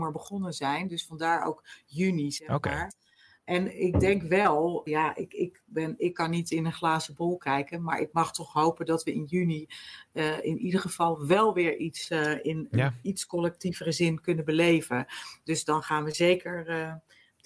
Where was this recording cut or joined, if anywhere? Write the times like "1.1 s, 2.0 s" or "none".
4.9 s